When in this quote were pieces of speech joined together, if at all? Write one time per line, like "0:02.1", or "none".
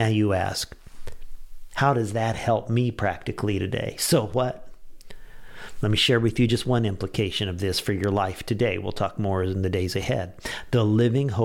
none